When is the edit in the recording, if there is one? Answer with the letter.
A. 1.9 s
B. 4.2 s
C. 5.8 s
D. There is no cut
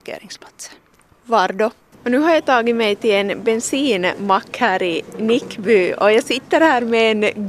A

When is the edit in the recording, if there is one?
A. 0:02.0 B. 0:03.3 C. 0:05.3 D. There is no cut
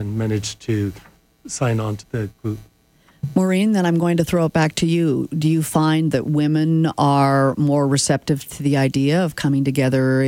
A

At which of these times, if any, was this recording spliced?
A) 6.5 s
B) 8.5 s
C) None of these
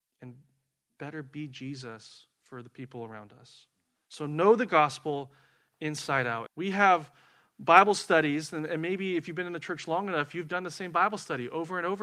A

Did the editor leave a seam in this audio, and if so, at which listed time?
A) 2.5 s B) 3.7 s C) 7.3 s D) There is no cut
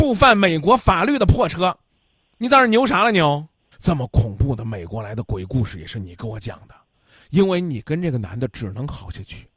B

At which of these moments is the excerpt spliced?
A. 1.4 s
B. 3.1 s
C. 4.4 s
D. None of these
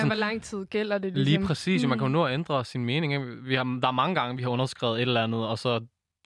D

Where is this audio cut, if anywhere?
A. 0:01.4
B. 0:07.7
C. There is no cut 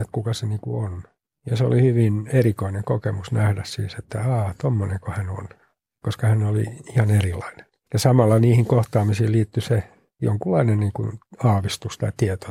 C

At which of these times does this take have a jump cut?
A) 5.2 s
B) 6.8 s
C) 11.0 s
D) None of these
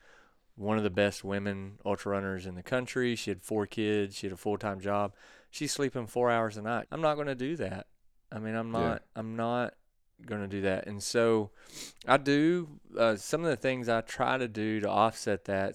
B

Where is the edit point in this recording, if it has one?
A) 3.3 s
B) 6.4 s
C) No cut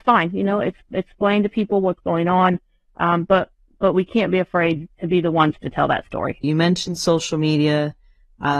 B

